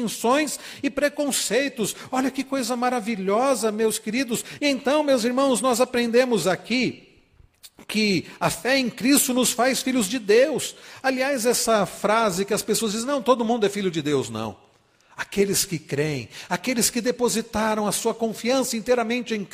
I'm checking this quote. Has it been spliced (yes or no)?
yes